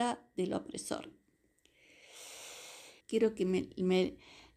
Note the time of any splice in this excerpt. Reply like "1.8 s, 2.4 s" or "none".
3.0 s